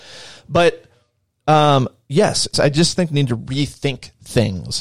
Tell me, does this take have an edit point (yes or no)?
yes